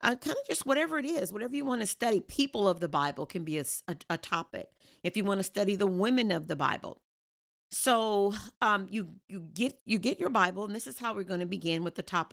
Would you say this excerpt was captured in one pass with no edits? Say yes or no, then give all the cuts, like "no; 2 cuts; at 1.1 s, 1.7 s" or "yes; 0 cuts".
yes; 0 cuts